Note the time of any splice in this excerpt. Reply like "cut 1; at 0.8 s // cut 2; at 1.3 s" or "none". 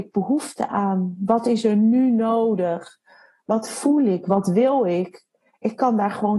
none